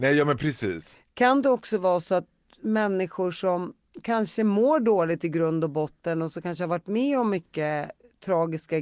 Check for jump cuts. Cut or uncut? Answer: uncut